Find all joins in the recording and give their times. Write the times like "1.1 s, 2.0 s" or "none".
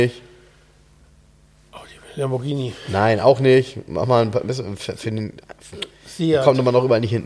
none